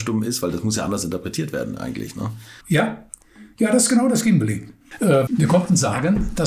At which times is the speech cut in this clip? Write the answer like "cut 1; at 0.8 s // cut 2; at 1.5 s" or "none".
cut 1; at 2.6 s // cut 2; at 5.3 s

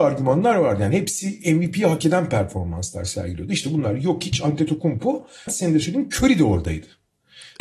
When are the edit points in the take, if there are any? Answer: cut 1; at 5.5 s

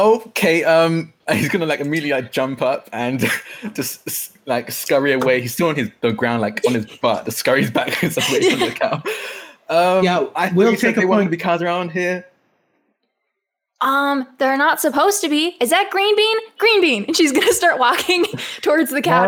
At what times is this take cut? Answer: none

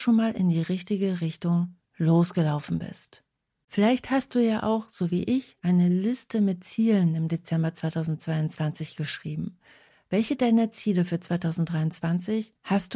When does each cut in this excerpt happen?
cut 1; at 3.6 s

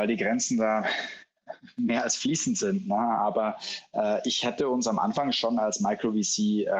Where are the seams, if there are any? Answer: none

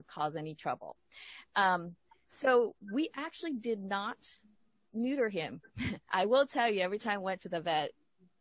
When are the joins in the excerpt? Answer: none

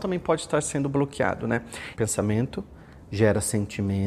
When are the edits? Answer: cut 1; at 2.0 s

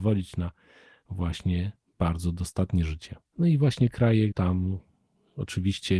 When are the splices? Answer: cut 1; at 3.3 s // cut 2; at 4.3 s

